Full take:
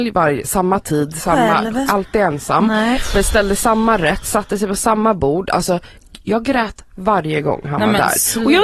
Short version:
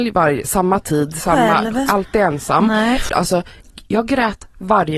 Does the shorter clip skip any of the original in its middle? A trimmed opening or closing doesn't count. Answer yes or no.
yes